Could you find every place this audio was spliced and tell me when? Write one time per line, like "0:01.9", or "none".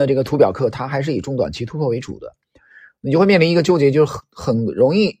none